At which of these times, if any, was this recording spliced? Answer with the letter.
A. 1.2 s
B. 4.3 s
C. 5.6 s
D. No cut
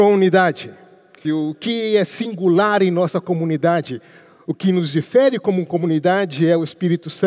A